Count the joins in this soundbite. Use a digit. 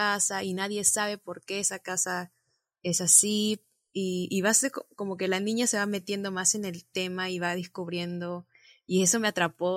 0